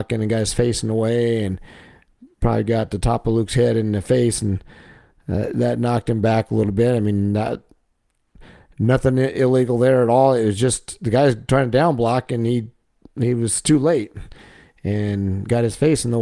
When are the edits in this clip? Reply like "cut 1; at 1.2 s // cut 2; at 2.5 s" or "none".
none